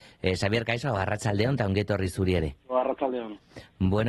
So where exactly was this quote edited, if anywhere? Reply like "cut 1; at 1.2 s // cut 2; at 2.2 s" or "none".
cut 1; at 2.6 s